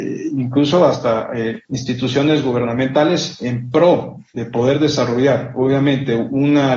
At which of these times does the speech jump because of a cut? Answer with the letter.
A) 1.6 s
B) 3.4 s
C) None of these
A